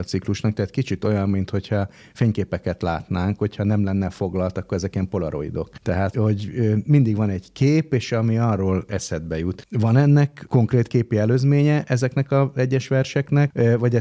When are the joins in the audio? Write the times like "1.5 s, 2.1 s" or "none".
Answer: 6.1 s